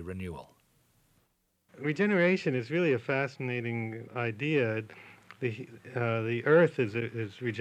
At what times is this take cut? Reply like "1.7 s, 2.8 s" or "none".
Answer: none

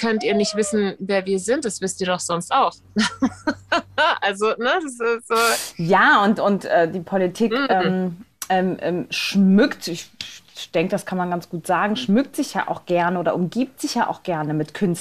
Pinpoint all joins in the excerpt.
none

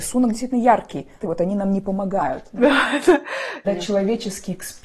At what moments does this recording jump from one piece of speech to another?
1.2 s, 2.6 s, 3.6 s

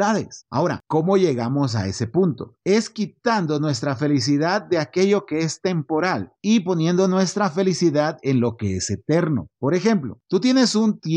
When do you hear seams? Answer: 9.5 s

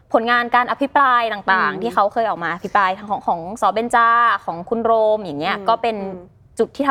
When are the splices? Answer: 3.6 s

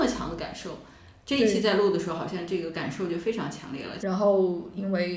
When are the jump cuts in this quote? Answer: 4.0 s

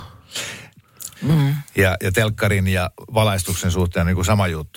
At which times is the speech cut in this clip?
1.2 s

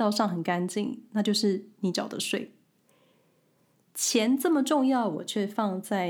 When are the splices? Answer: none

